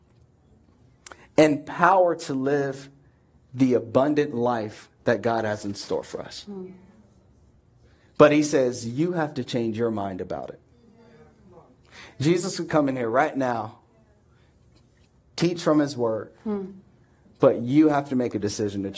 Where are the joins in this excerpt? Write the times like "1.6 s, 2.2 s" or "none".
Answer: none